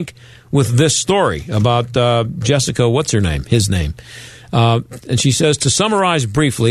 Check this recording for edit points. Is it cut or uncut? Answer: uncut